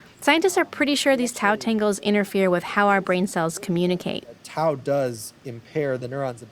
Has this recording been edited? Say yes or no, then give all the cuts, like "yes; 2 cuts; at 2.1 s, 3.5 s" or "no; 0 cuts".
no; 0 cuts